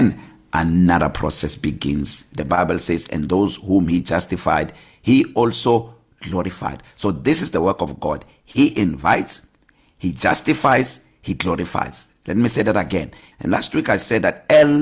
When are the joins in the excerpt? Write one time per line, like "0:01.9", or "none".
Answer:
0:13.3